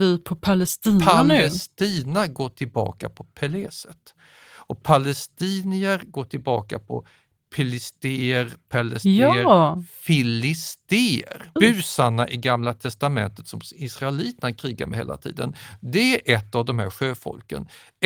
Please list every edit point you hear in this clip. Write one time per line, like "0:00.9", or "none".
0:11.6

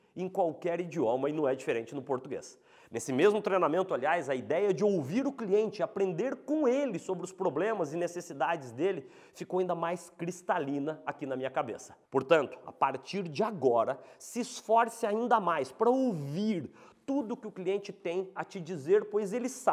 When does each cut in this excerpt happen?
0:12.0

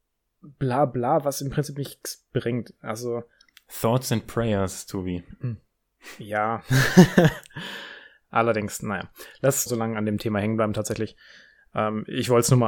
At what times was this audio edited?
0:09.7

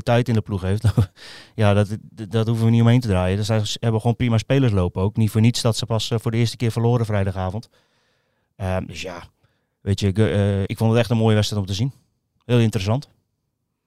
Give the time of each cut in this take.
0:10.6

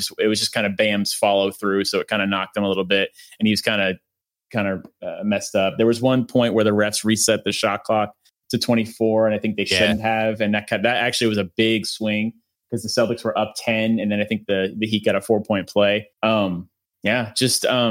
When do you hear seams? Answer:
0:16.1

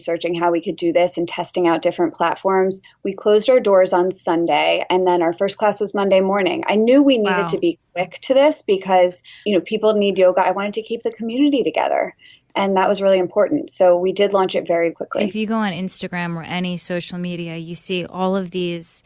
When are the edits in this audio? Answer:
0:09.4
0:14.9

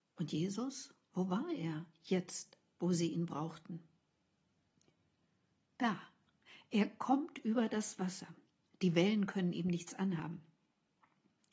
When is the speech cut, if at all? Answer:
0:01.0

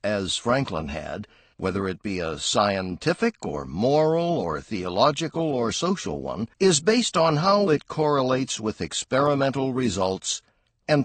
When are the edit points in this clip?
0:01.5
0:06.5
0:07.7

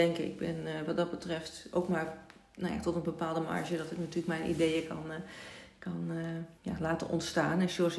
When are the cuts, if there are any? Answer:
0:06.6

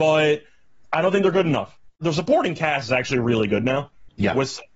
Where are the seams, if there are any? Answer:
0:02.0

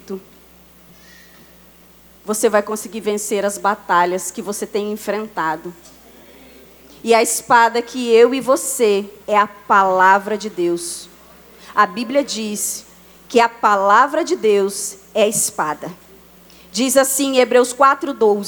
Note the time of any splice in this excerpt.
0:09.2

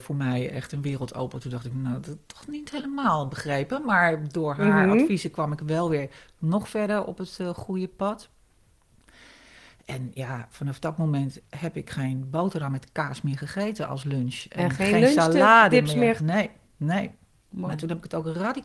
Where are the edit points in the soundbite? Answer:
0:16.2
0:17.7

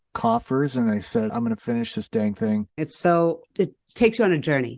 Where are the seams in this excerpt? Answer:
0:01.3
0:02.8

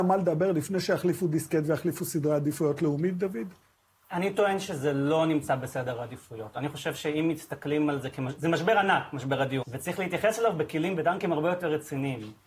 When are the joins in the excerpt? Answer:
0:09.6
0:11.0

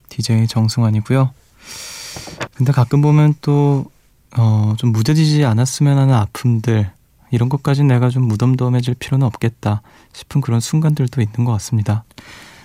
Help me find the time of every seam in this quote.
0:02.5

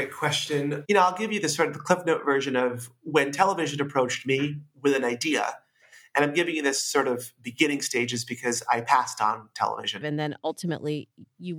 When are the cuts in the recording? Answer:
0:10.0

